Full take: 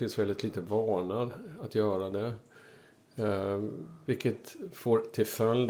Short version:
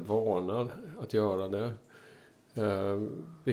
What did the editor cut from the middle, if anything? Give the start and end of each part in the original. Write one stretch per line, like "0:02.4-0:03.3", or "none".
none

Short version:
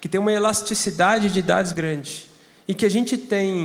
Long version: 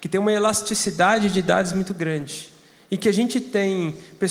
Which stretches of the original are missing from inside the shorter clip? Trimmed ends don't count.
0:01.7-0:01.9

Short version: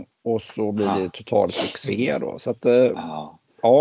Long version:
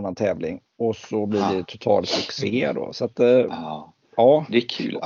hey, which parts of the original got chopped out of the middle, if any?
none

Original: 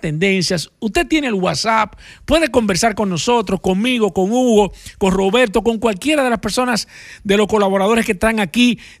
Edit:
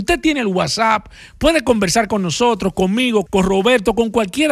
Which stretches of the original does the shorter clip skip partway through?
0:04.1-0:04.9

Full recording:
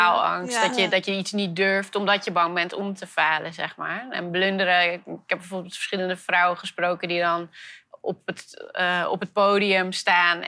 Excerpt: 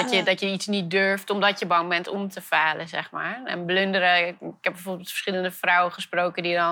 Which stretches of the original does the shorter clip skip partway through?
none

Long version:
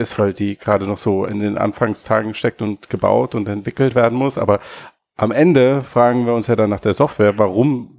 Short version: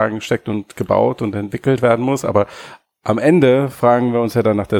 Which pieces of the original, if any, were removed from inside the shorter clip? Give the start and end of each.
none

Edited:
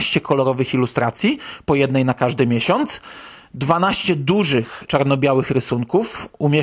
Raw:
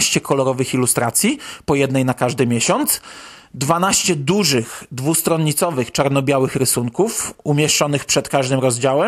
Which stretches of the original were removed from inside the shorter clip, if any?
0:04.9-0:05.9

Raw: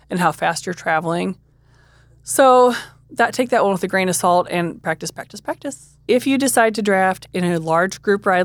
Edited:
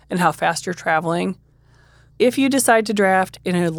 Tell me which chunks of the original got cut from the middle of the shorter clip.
0:02.1-0:06.0

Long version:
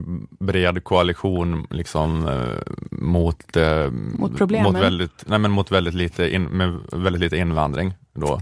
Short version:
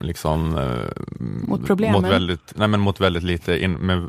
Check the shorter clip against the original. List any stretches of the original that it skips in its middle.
0:02.9-0:03.9

